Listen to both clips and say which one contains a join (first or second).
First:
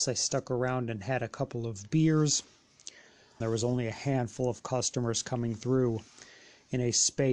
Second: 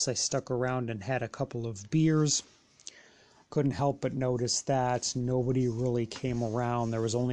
first